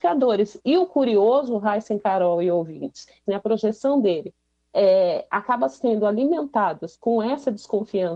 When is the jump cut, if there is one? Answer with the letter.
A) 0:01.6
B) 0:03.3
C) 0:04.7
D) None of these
B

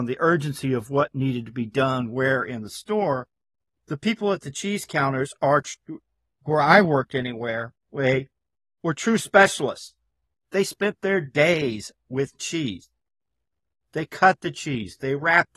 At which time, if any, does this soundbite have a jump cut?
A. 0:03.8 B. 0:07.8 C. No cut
B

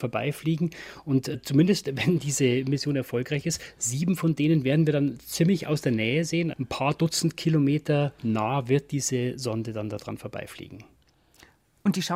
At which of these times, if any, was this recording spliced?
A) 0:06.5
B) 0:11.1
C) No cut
A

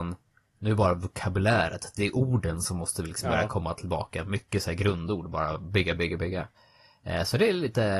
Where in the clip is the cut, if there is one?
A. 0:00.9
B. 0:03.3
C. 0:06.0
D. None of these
C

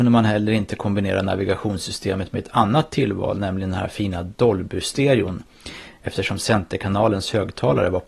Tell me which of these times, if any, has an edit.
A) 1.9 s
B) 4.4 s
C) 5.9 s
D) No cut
D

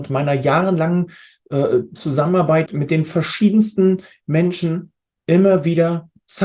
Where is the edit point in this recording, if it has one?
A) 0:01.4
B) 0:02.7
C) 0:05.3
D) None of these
B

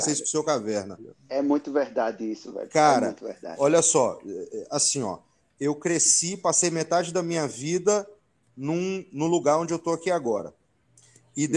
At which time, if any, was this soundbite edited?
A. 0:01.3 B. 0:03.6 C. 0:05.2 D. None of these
D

